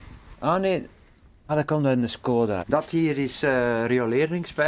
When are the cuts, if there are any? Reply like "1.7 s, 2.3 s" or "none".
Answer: 1.5 s, 2.6 s

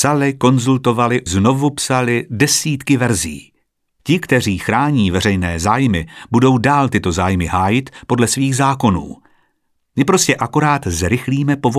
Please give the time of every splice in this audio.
1.3 s, 4.0 s

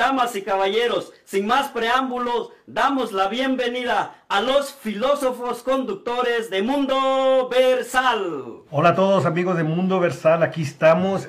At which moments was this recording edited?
8.7 s

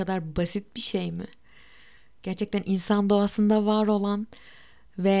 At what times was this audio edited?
none

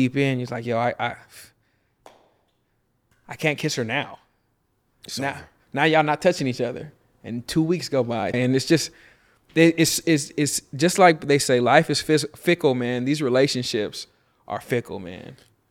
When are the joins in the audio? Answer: 8.3 s

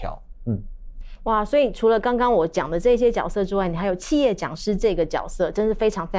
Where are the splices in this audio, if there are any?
none

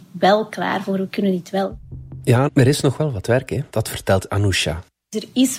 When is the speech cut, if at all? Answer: 2.5 s, 3.7 s

